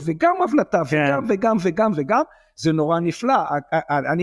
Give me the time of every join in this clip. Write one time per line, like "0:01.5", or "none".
none